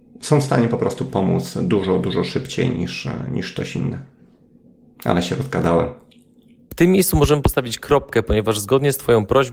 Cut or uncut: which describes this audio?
uncut